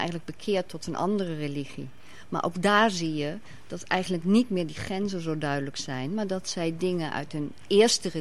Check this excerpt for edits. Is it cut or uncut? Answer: uncut